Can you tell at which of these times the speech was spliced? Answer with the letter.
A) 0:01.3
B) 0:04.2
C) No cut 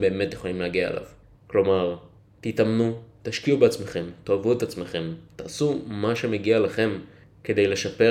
A